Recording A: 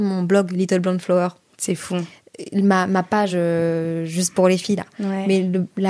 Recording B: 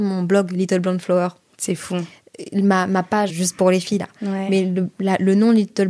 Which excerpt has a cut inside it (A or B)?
B